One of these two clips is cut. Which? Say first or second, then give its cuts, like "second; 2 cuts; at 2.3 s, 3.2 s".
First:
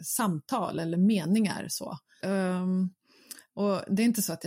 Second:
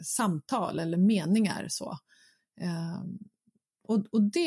first; 1 cut; at 2.2 s